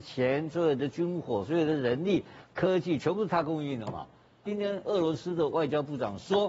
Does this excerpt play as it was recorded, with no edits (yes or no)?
no